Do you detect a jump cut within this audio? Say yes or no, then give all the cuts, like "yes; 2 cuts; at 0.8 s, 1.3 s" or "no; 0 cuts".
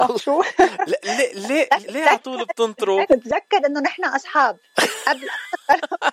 yes; 2 cuts; at 1.8 s, 3.1 s